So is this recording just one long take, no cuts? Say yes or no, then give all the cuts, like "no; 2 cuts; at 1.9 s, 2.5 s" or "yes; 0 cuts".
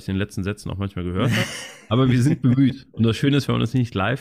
yes; 0 cuts